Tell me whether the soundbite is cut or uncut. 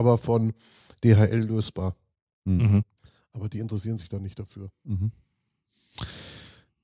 uncut